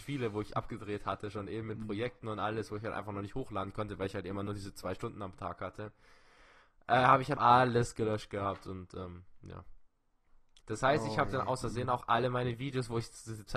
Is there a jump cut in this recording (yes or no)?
yes